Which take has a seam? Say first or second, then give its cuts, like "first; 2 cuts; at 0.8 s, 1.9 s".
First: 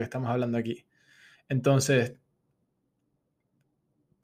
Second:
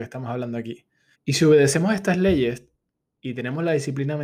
second; 2 cuts; at 1.1 s, 3.2 s